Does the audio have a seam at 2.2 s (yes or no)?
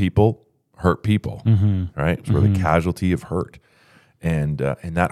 yes